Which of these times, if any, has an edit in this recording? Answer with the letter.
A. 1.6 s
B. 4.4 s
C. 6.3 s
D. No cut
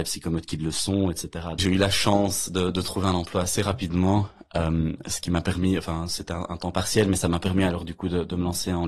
A